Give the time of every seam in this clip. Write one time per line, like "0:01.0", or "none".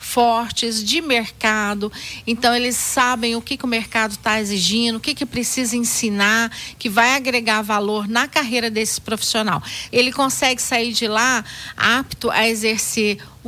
0:09.9